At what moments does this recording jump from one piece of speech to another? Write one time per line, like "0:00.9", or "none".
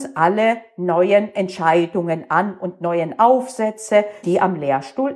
0:04.2